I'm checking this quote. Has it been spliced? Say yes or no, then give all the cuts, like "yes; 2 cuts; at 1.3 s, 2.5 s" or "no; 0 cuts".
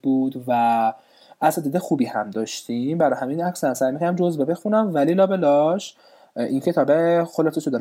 no; 0 cuts